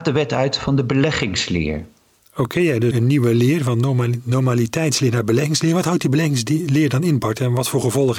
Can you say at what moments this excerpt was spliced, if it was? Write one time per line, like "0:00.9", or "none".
0:02.9